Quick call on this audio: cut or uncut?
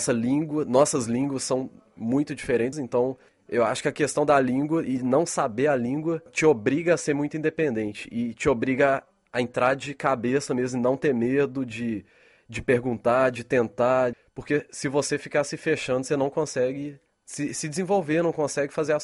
cut